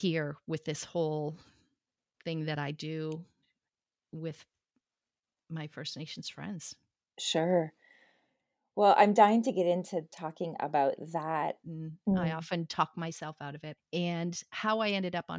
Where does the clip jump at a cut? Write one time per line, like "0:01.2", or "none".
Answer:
0:11.6
0:13.8